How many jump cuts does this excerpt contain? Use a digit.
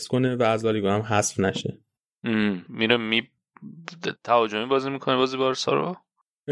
1